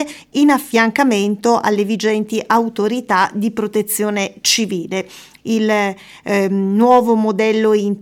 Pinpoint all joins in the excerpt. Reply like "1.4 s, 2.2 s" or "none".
5.4 s